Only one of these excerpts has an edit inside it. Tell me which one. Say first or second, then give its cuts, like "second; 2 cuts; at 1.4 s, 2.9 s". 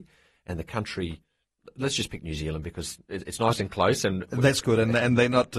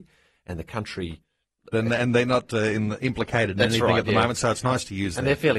second; 1 cut; at 1.7 s